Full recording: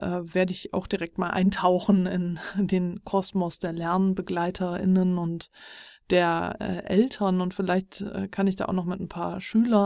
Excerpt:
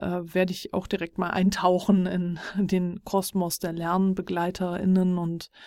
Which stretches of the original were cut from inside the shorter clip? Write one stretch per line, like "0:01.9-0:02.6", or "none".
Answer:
none